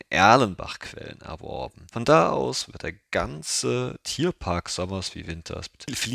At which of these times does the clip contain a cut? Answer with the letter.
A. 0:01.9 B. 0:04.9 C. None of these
C